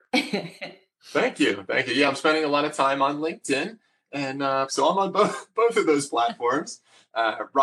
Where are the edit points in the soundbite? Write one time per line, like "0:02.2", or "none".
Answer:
0:04.7